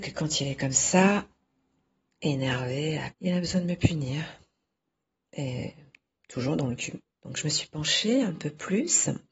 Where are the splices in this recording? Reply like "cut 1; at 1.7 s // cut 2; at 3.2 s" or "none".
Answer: cut 1; at 3.1 s // cut 2; at 7.1 s

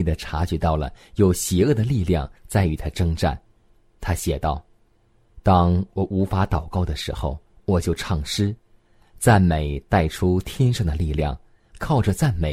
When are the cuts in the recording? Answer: none

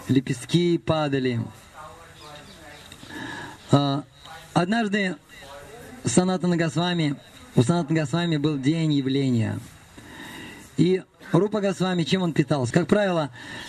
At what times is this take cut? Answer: cut 1; at 12.7 s

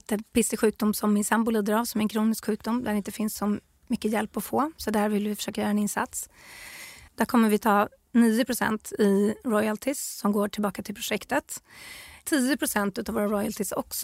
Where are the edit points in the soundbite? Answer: cut 1; at 7.1 s

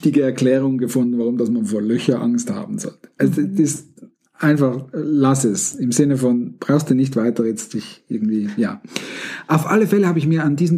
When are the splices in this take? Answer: none

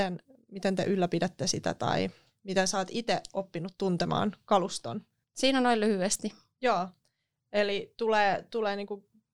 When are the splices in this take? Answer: cut 1; at 5.2 s

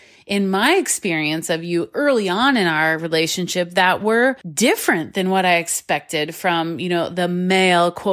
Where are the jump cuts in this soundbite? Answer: cut 1; at 4.4 s

